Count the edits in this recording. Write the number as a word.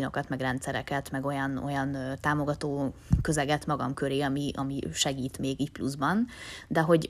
zero